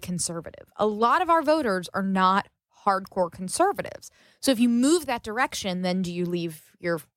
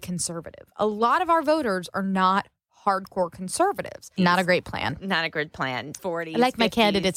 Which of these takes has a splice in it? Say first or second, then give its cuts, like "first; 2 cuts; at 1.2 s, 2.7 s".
second; 2 cuts; at 4.2 s, 6.0 s